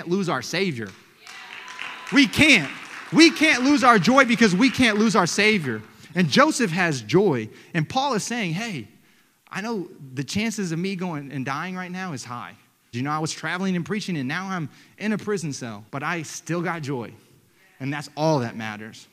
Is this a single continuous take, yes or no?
no